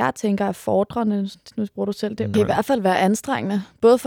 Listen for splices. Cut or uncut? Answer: cut